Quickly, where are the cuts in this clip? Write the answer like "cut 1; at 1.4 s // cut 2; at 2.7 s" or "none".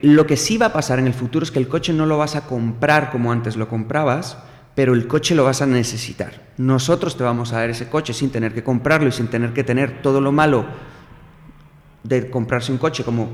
none